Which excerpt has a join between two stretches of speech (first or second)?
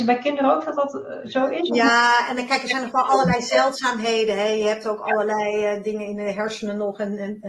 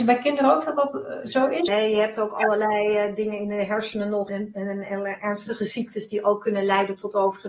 second